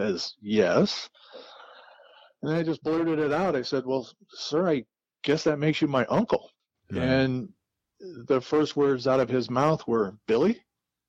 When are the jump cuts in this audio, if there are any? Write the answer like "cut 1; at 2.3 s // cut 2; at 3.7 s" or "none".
none